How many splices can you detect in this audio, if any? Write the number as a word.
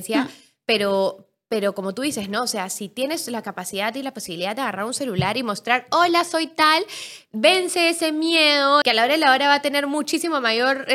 one